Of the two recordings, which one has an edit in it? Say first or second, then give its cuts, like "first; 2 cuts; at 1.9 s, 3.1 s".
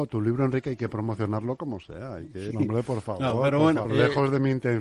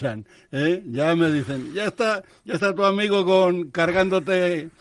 first; 2 cuts; at 2.5 s, 3.8 s